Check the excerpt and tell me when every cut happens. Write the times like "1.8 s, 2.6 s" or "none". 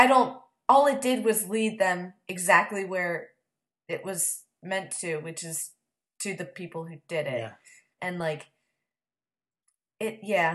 8.0 s